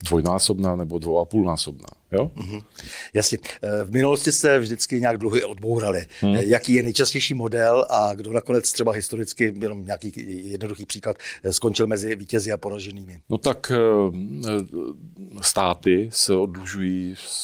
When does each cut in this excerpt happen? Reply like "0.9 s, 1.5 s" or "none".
13.2 s